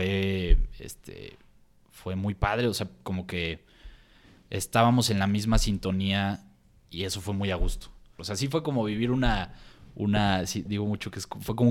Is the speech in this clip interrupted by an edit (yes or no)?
yes